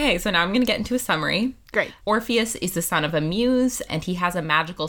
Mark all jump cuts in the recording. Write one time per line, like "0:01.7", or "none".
0:02.0
0:03.9